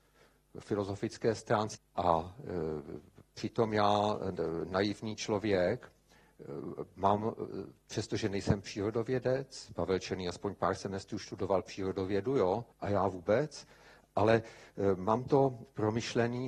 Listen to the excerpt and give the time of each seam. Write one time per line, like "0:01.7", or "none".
0:01.8
0:12.7